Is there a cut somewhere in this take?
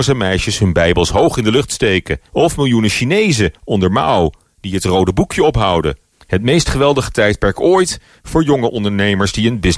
yes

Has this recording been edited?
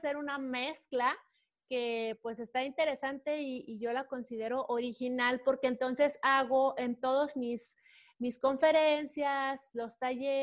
no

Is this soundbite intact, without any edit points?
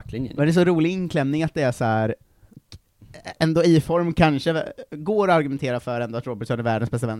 yes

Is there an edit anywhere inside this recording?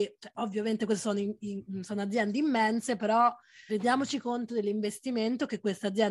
yes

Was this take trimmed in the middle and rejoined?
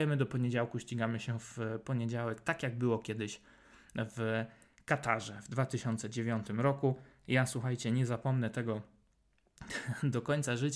no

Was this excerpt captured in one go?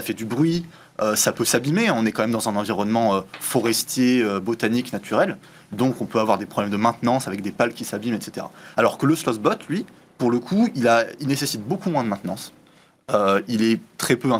yes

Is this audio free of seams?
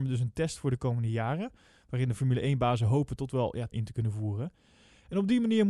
no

